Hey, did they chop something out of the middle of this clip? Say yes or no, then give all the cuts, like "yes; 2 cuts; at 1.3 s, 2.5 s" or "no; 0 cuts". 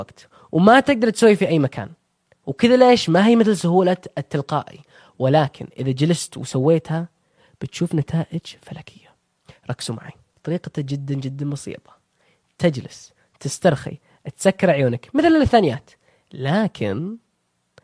no; 0 cuts